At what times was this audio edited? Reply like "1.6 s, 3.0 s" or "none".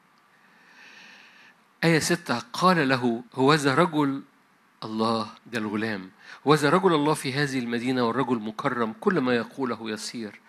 3.3 s, 5.4 s

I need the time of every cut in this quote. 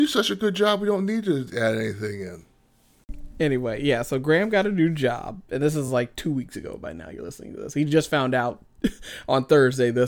none

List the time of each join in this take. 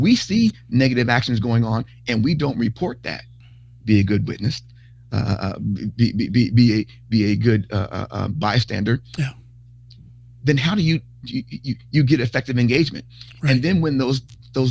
none

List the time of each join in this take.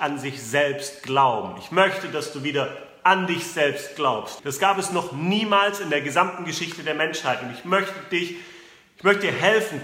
4.4 s

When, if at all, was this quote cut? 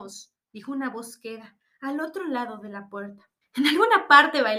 3.4 s

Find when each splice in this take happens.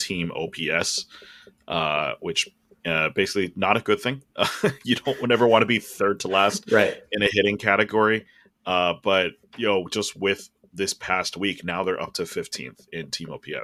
none

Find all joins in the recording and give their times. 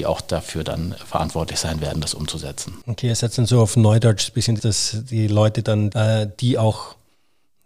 4.6 s, 5.9 s

